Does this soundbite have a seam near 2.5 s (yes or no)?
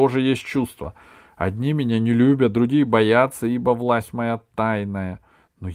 no